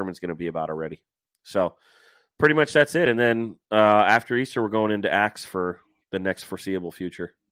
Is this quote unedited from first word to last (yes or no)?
yes